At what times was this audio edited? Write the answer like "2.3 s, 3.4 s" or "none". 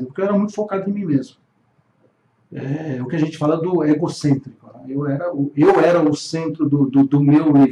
none